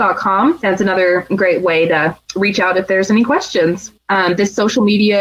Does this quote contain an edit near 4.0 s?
yes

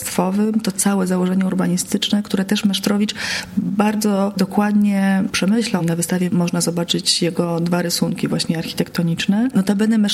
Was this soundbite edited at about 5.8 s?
yes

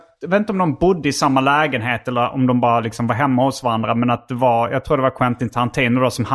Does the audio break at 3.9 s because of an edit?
no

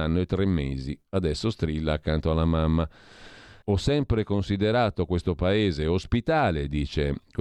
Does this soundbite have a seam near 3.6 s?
yes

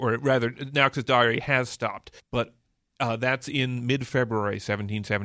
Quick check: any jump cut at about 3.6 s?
no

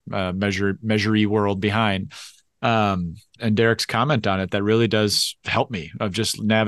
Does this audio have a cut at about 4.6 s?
no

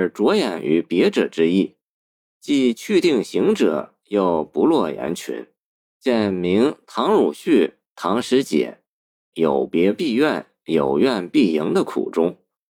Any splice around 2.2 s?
no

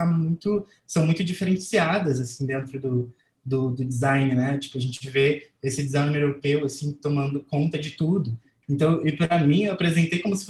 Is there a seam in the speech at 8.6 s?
yes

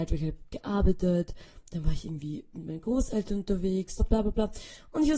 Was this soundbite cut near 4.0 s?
yes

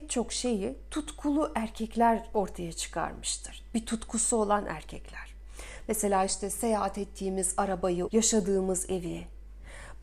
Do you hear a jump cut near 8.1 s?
yes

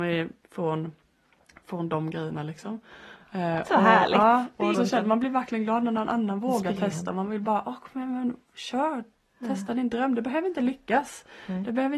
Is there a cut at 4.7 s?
yes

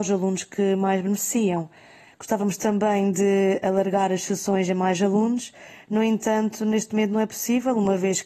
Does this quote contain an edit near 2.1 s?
yes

